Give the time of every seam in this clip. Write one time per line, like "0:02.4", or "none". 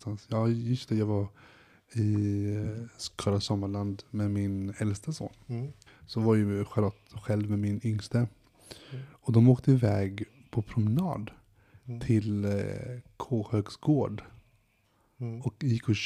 0:05.9